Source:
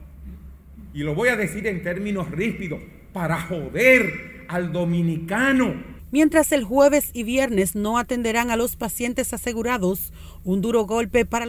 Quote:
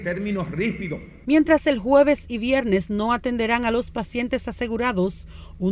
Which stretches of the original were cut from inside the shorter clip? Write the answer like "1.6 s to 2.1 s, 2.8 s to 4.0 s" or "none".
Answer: 3.0 s to 6.1 s